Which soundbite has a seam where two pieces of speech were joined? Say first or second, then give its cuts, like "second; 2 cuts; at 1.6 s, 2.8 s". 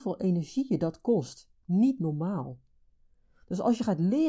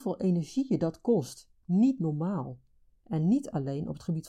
second; 1 cut; at 3.0 s